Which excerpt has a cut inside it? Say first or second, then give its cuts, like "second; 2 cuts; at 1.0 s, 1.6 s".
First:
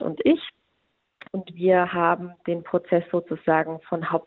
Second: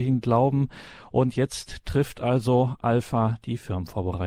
first; 1 cut; at 1.2 s